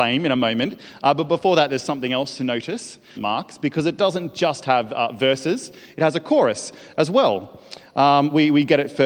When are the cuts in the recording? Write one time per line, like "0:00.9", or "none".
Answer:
0:03.2